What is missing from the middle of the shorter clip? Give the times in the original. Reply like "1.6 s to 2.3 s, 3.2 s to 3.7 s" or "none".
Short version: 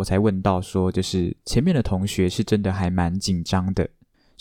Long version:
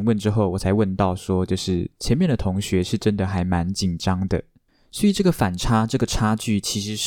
none